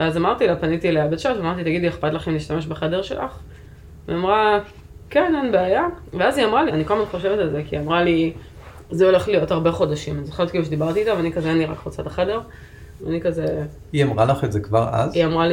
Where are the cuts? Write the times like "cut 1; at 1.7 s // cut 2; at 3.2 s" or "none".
cut 1; at 6.7 s // cut 2; at 13.0 s

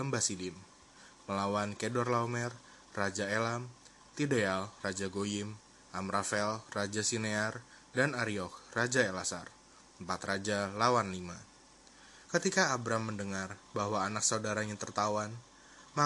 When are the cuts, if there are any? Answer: cut 1; at 12.3 s

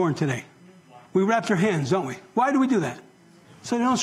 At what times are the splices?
cut 1; at 1.1 s

